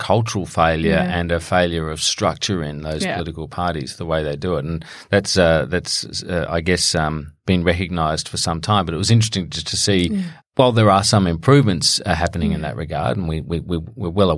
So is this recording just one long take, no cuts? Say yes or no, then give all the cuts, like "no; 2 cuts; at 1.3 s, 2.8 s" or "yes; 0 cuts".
no; 1 cut; at 10.4 s